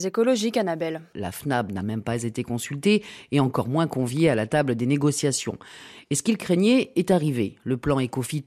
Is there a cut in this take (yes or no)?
yes